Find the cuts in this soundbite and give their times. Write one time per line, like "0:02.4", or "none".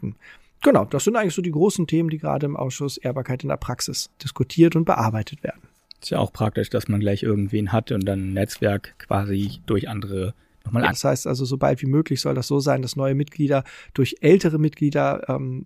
0:04.1
0:10.9